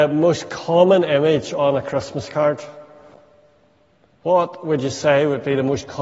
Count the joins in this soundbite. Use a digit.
0